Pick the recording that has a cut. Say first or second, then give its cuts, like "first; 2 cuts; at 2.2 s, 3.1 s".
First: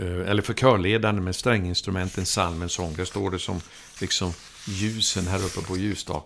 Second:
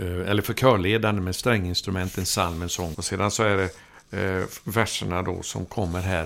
second; 1 cut; at 2.9 s